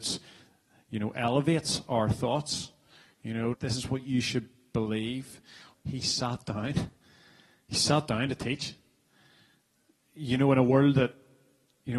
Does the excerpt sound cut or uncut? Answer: cut